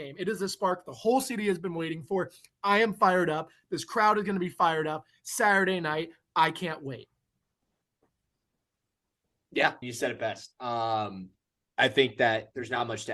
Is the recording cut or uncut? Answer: cut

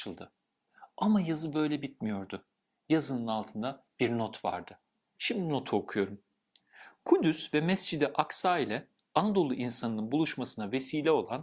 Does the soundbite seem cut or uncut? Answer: uncut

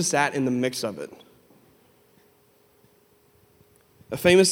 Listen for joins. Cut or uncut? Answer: uncut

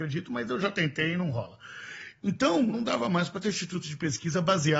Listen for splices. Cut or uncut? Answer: cut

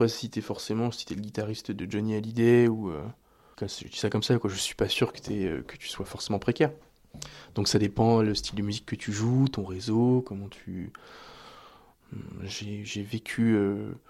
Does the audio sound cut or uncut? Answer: cut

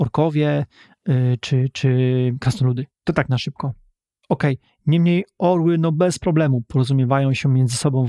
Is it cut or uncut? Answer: uncut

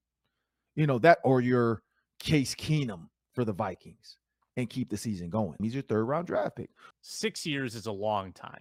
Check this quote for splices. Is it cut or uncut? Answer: cut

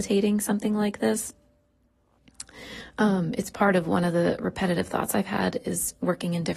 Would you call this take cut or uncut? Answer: uncut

